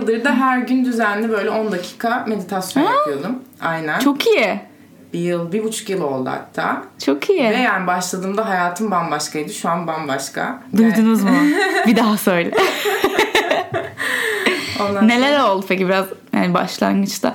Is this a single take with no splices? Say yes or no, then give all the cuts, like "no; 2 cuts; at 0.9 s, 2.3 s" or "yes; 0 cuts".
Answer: yes; 0 cuts